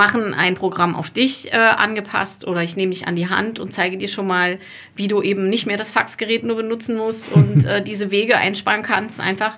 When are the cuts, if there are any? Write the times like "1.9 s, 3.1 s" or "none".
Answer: none